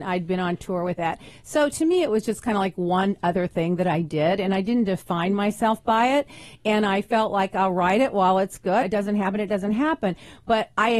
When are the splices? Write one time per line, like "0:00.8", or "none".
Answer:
0:08.8

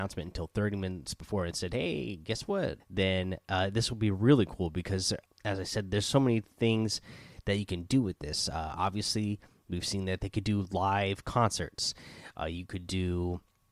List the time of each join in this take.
0:02.8
0:05.3

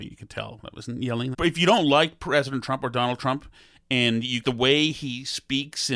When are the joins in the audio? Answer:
0:01.3
0:04.4

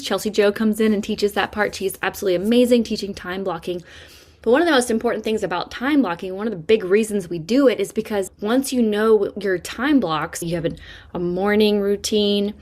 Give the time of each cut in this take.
0:08.3
0:10.4

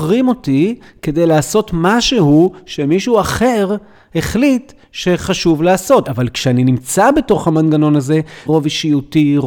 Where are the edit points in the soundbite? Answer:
0:06.0
0:08.5

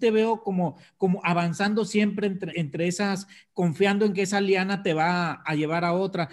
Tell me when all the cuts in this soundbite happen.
0:02.5

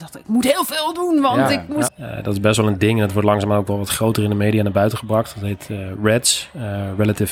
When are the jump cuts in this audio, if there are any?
0:01.9

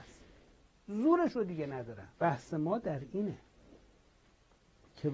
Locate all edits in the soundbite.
0:02.1

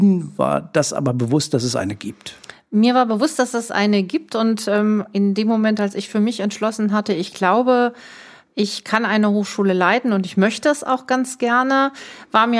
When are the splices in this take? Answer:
none

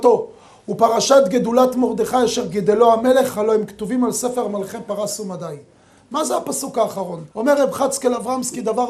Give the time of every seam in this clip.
0:07.3

